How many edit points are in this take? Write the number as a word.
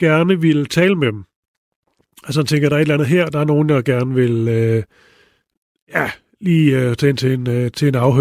zero